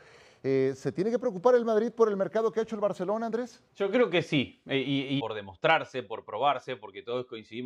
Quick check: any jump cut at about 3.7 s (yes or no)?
yes